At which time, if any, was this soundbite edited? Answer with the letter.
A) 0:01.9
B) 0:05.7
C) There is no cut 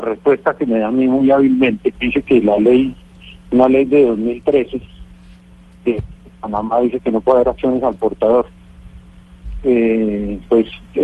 A